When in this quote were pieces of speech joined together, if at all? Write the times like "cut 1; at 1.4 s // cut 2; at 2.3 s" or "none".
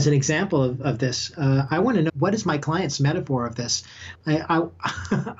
cut 1; at 2.1 s // cut 2; at 4.1 s